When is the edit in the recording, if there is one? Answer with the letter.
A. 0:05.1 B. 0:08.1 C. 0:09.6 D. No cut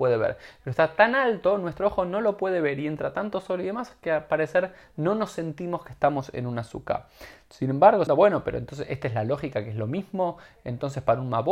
B